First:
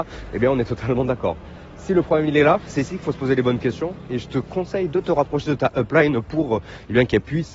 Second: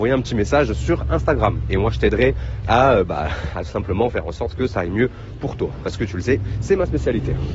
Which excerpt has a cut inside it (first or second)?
second